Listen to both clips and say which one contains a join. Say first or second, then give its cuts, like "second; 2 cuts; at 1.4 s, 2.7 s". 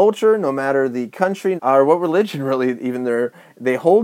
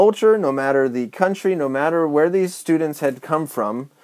first; 1 cut; at 1.6 s